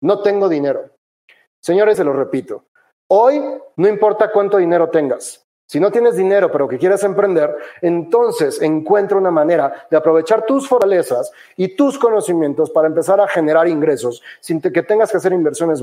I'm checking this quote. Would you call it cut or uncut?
cut